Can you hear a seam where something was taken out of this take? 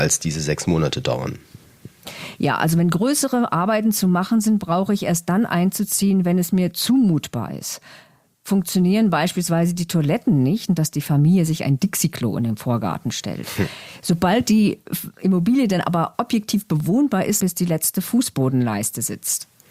yes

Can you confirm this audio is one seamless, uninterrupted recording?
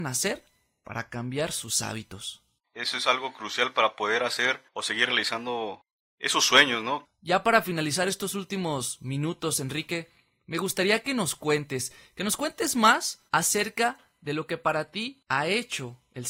no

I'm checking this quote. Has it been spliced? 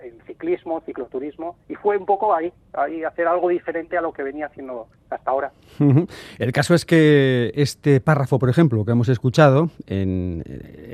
no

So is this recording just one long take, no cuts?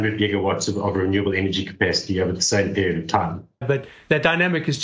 no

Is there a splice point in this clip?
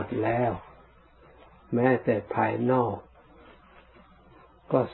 no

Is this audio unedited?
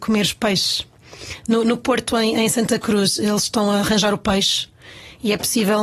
yes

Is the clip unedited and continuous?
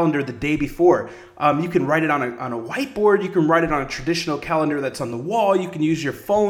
yes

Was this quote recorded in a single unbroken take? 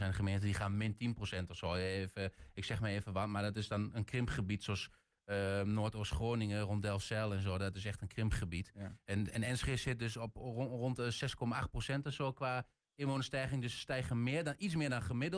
yes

